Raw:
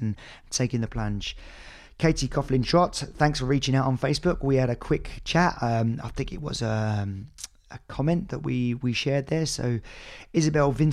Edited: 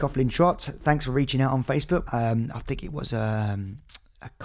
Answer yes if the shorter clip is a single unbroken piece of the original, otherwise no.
no